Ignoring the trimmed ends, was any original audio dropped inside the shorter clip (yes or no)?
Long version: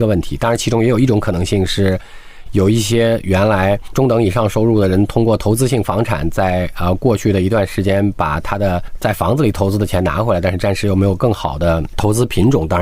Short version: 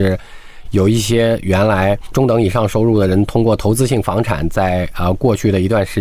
no